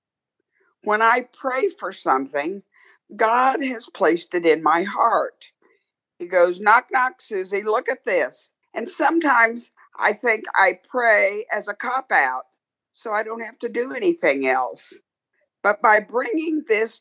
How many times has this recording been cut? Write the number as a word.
one